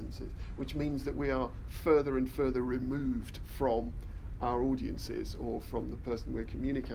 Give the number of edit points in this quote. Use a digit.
0